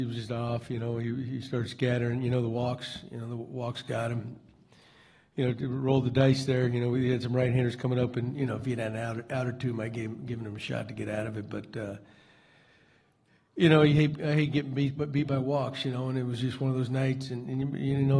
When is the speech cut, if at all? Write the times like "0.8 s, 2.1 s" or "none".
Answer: none